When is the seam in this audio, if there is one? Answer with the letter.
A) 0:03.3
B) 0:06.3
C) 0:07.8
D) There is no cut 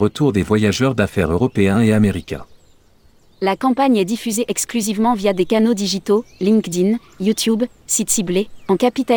D